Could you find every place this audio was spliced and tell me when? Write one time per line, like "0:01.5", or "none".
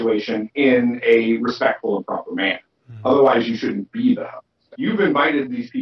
0:04.7